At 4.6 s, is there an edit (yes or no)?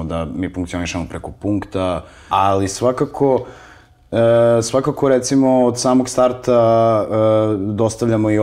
no